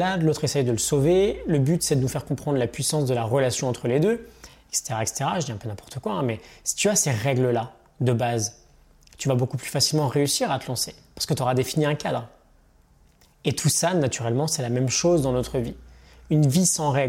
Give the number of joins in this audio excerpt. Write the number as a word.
zero